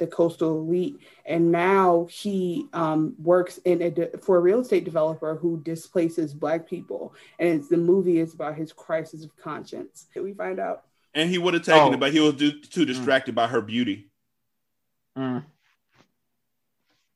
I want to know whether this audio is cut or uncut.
cut